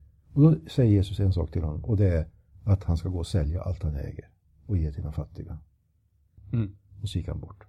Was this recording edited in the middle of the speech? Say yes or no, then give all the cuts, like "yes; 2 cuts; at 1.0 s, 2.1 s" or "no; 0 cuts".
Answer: yes; 1 cut; at 6.4 s